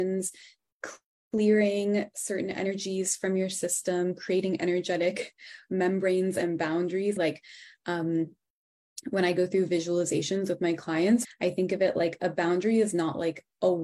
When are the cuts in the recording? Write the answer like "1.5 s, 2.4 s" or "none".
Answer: 7.2 s, 11.2 s